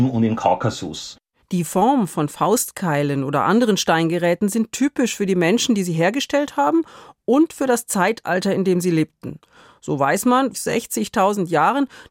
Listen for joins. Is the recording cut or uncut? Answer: cut